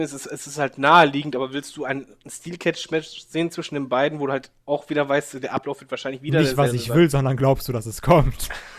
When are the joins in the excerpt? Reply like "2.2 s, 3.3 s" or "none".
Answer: none